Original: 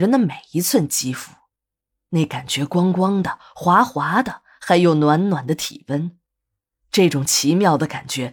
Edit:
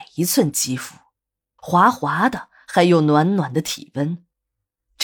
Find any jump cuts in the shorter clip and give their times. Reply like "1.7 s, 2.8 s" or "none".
1.6 s